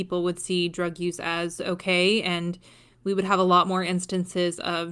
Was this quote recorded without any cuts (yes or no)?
yes